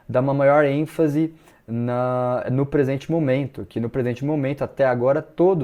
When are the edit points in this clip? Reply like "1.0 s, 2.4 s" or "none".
none